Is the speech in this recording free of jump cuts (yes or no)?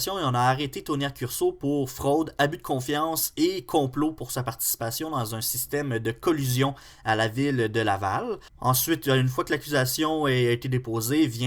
no